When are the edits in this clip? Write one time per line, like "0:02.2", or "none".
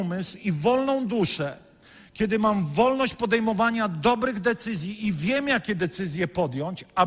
none